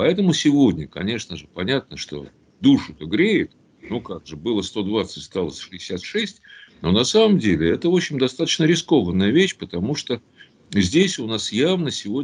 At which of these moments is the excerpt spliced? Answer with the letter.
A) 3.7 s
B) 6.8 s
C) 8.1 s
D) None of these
D